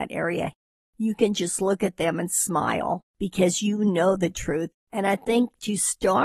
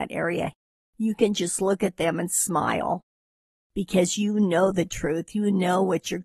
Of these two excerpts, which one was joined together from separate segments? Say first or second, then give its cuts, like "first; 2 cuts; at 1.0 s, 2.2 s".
first; 2 cuts; at 3.1 s, 4.7 s